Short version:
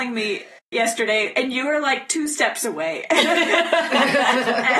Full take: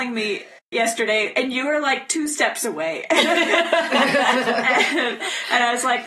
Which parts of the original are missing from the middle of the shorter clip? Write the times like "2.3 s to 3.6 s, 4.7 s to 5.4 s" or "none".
none